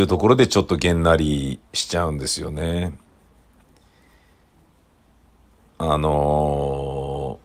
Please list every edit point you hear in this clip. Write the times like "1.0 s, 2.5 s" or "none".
1.7 s